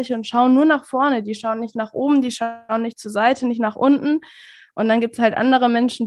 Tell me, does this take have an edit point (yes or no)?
no